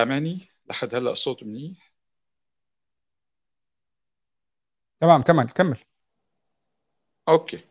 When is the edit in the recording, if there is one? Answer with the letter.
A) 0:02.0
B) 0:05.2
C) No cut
C